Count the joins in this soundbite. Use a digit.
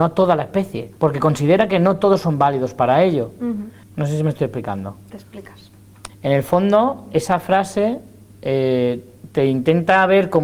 3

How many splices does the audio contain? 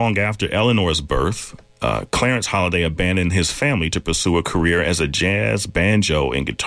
0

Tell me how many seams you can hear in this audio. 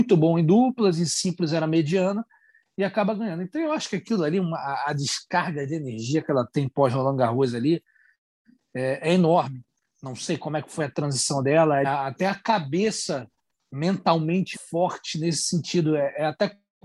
2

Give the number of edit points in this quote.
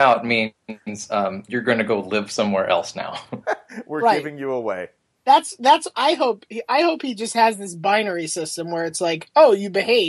1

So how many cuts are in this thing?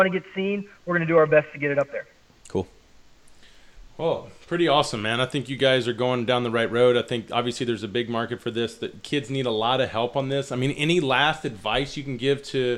0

